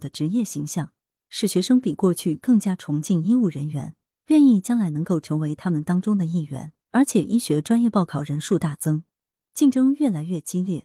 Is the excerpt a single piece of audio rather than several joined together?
no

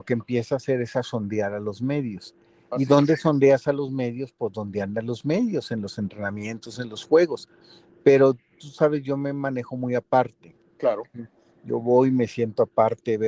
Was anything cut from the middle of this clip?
no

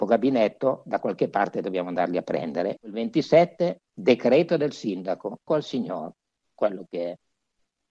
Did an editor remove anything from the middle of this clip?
yes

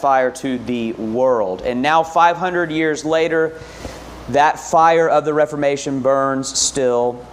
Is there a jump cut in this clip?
no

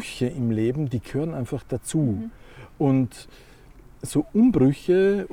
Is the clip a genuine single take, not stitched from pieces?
yes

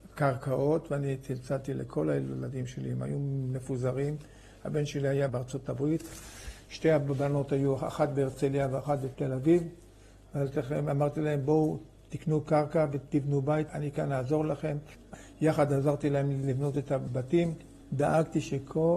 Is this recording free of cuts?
yes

